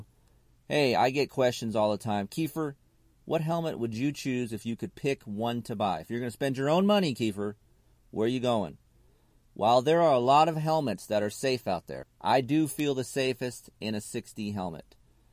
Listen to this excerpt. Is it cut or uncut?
cut